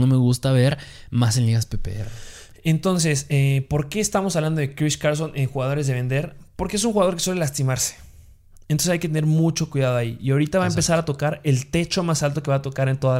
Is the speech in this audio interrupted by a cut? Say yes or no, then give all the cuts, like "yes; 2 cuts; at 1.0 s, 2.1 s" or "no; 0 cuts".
no; 0 cuts